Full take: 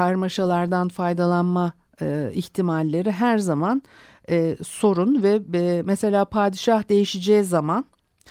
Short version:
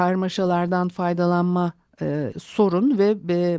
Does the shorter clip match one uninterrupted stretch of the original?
no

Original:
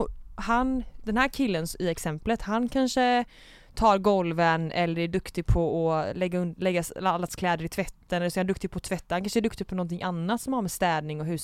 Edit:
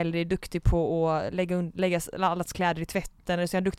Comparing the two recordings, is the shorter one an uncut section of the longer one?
yes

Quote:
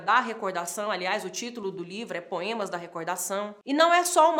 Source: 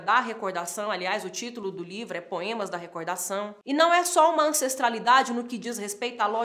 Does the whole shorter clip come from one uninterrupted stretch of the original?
yes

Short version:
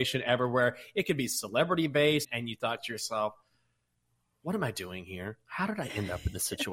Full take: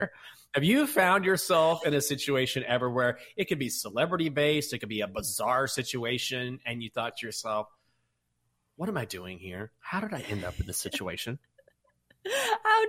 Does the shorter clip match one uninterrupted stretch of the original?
no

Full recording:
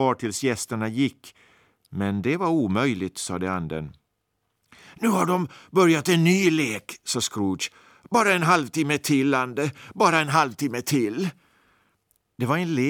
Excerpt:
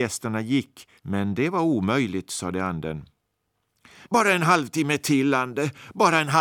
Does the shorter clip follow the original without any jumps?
no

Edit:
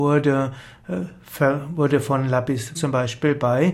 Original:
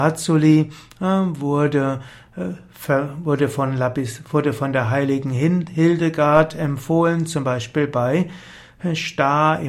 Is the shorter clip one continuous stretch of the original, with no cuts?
no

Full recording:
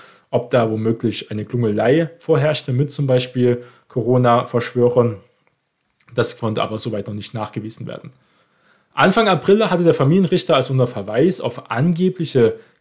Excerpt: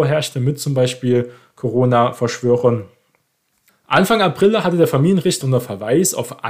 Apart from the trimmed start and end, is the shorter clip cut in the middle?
yes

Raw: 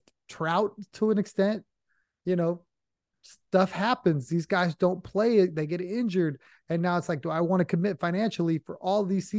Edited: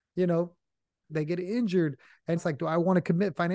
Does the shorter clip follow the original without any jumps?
no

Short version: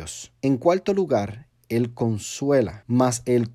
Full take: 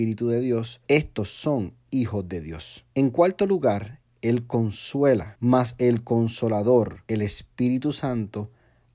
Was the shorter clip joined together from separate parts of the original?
no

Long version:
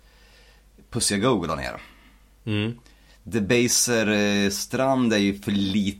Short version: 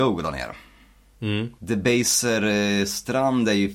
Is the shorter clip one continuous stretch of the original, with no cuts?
no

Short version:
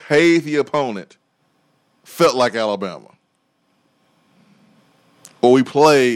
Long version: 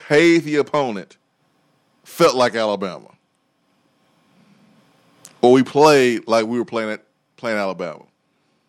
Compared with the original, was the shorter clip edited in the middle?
no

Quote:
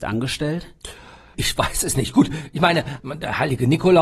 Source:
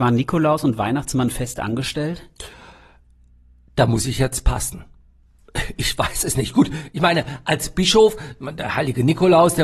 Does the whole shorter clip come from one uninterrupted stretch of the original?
no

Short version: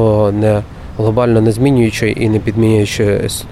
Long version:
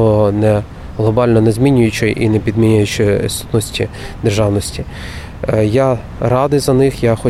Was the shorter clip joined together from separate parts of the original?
no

